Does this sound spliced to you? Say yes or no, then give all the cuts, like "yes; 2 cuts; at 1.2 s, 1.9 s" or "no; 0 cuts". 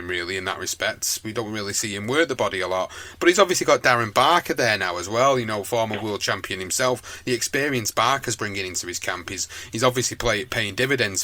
no; 0 cuts